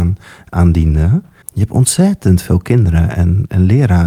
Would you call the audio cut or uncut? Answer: uncut